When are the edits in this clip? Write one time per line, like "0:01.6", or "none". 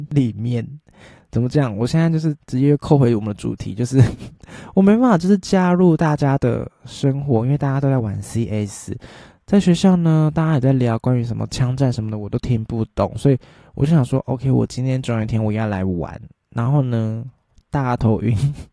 none